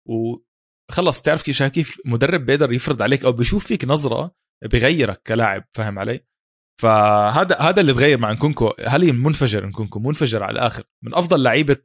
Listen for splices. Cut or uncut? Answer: uncut